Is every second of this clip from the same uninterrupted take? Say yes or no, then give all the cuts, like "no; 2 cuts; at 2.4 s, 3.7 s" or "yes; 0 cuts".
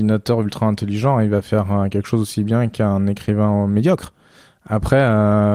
yes; 0 cuts